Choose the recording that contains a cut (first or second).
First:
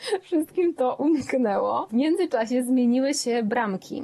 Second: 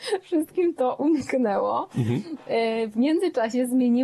first